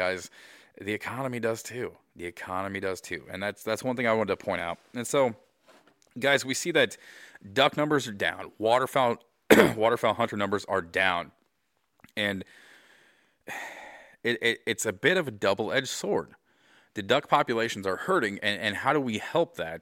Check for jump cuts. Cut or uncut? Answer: uncut